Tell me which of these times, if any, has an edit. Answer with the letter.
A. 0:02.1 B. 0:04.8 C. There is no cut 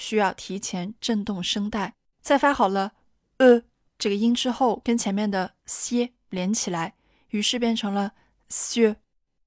A